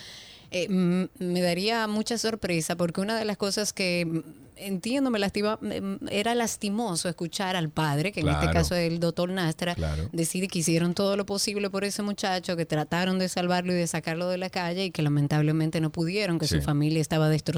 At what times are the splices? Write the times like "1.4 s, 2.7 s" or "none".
none

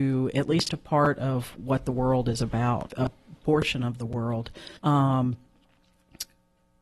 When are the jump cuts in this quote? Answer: 2.9 s, 4.8 s

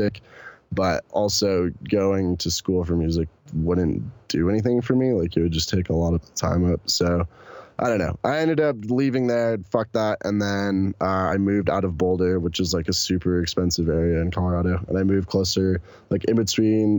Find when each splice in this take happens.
none

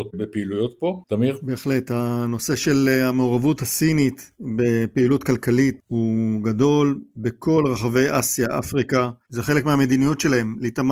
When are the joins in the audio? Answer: 1.0 s

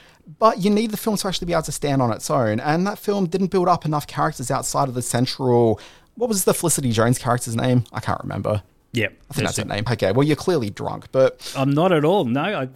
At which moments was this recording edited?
8.8 s, 9.9 s

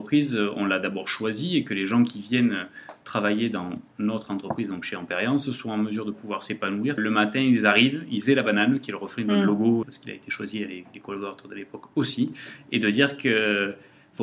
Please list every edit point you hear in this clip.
7.0 s, 9.8 s

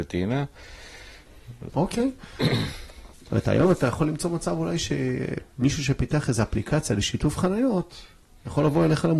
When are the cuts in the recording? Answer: 1.7 s, 3.1 s

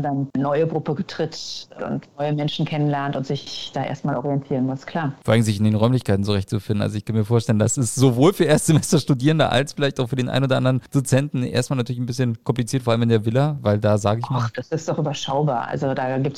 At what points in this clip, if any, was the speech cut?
1.8 s

